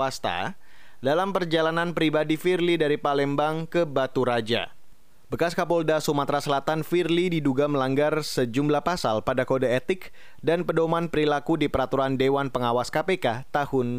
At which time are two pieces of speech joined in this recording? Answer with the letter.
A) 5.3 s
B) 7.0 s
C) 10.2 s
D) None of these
D